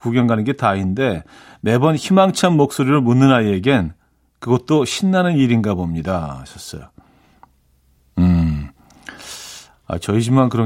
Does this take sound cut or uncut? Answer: uncut